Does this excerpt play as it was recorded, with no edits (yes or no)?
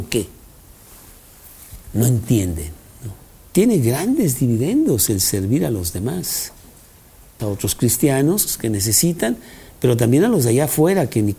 no